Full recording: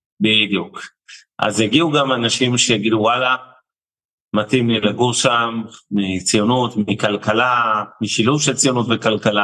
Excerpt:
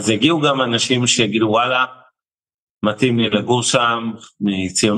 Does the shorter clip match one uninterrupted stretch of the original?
yes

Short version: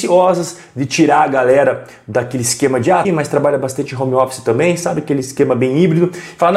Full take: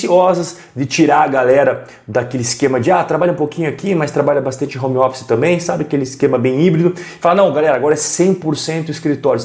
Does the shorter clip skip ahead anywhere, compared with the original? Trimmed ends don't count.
yes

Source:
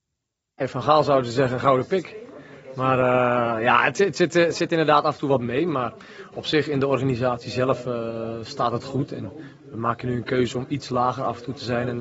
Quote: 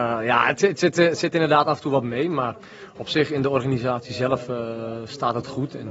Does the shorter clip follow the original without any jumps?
yes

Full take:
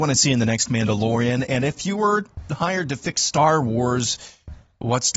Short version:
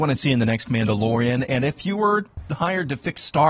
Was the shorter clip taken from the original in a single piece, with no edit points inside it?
yes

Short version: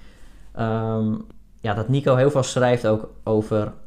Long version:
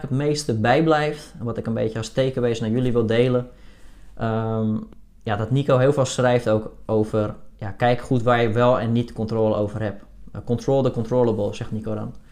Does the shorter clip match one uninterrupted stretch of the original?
yes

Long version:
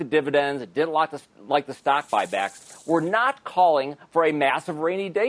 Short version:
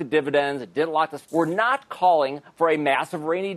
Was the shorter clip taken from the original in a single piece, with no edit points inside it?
no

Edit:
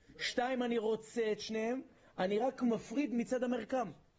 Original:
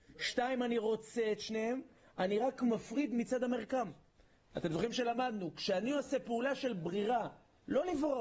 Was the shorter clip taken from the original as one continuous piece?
yes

